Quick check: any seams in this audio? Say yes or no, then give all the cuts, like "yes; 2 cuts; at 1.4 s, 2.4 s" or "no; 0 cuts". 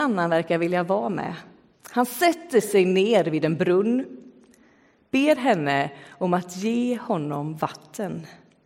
yes; 1 cut; at 1.7 s